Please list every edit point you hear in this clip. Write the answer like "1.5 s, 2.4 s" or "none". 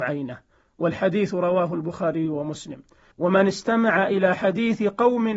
3.1 s